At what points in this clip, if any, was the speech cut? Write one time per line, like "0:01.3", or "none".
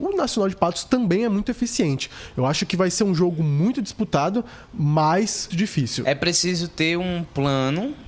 0:05.5